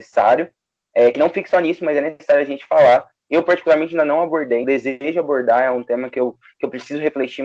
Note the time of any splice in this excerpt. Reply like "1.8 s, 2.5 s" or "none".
4.6 s